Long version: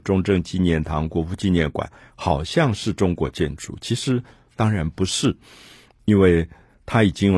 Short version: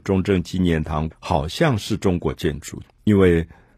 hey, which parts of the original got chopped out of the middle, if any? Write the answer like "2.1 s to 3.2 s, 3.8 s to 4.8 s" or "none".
1.1 s to 2.1 s, 3.8 s to 5.8 s